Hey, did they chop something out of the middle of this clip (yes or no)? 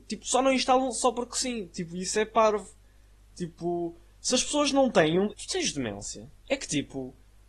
yes